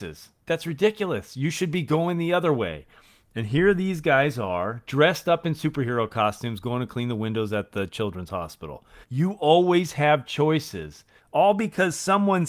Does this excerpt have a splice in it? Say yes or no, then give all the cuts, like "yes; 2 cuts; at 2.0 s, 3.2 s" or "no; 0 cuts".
yes; 2 cuts; at 9.0 s, 11.2 s